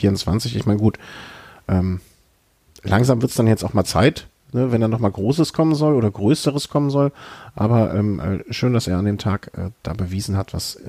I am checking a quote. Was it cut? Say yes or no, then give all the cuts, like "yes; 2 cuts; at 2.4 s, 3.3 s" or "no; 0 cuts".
no; 0 cuts